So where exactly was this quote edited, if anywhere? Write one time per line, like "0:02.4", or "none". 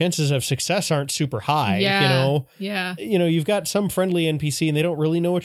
none